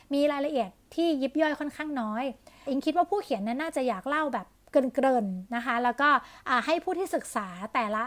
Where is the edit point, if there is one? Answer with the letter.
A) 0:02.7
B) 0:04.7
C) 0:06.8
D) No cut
A